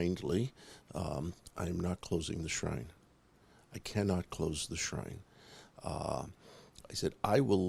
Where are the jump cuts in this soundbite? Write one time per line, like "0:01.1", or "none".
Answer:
0:01.5